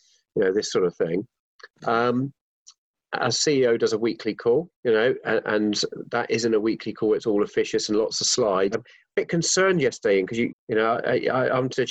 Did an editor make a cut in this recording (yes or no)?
yes